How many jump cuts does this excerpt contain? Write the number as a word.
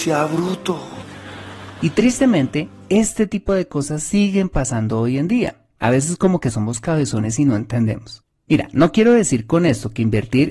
zero